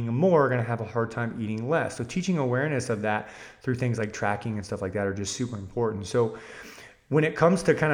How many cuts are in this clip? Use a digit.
0